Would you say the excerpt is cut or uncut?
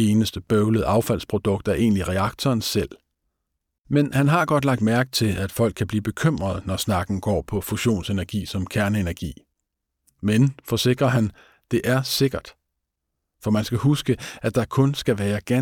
cut